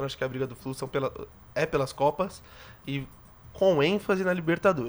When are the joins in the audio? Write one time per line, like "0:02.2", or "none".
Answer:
none